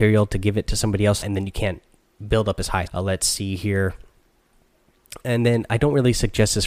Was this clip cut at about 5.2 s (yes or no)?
no